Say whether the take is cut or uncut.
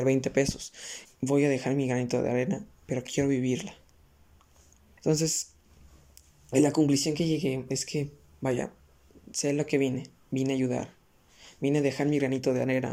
cut